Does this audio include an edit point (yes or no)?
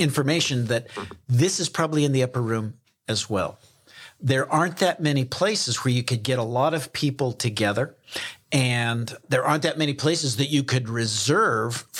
no